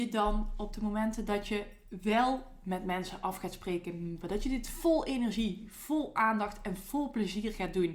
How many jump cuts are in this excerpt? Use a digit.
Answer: 1